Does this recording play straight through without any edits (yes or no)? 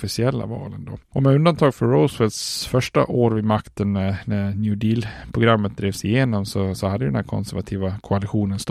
yes